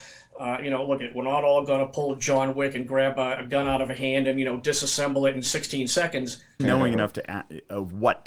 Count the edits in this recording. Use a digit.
1